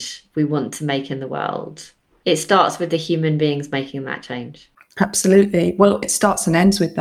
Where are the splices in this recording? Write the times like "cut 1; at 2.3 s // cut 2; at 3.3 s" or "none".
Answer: cut 1; at 6.0 s